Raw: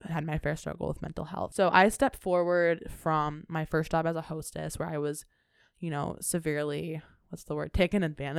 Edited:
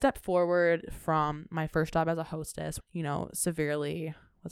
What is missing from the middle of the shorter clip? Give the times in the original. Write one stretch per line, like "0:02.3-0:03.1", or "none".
0:04.8-0:05.7

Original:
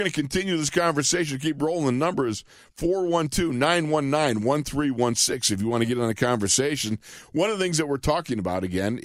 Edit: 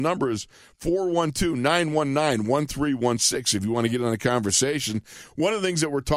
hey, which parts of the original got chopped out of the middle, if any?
none

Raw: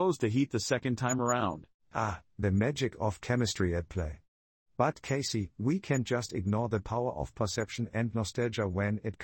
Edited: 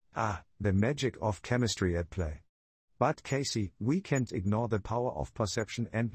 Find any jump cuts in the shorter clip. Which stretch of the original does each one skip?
0:06.1-0:06.3

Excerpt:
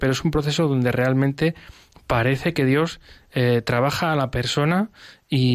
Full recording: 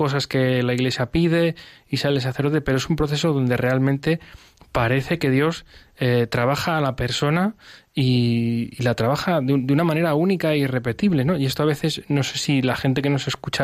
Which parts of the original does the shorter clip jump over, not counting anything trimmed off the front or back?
none

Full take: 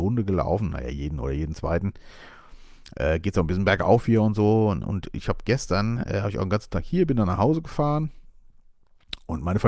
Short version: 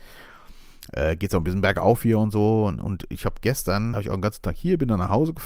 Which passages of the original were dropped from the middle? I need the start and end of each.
0:06.0-0:06.2

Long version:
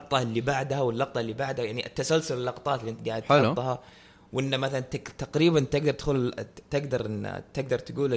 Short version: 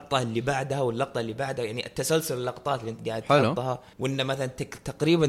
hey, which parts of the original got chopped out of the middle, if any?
0:03.9-0:04.3

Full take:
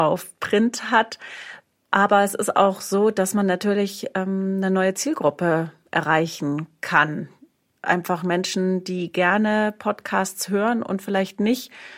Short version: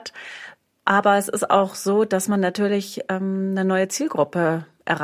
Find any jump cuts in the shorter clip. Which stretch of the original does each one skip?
none

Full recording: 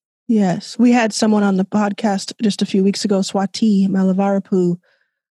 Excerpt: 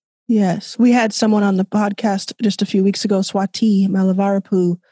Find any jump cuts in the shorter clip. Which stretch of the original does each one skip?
none

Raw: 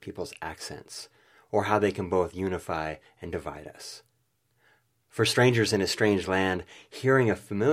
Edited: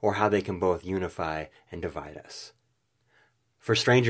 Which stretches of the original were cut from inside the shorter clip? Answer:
none

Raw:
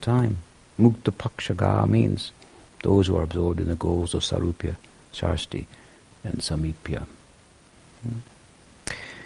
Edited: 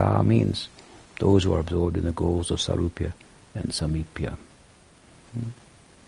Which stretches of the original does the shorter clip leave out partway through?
0:05.0-0:06.1

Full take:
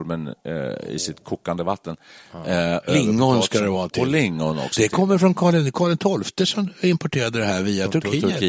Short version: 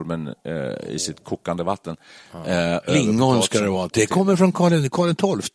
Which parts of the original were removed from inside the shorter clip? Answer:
0:03.9-0:04.8

